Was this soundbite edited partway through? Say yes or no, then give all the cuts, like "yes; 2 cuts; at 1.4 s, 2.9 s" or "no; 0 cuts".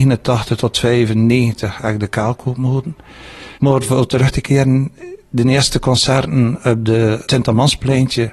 yes; 2 cuts; at 3.6 s, 7.2 s